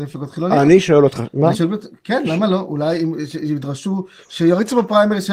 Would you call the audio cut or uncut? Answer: uncut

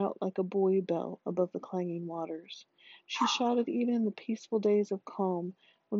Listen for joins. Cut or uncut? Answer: uncut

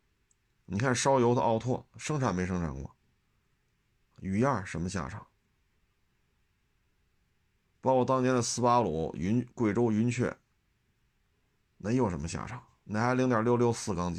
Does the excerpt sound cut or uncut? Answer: cut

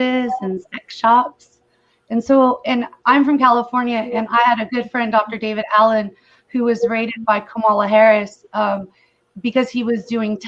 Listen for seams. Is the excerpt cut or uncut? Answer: uncut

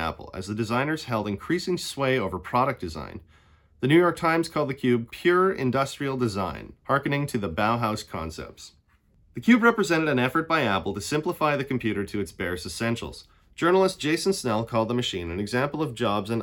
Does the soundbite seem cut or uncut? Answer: cut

